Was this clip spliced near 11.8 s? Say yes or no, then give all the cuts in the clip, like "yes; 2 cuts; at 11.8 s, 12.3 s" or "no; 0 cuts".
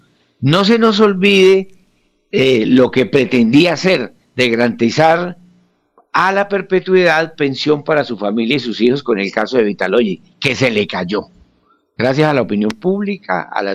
no; 0 cuts